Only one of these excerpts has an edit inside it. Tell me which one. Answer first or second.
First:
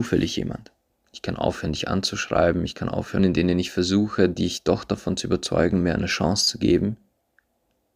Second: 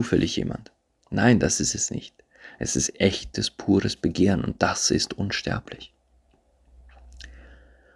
first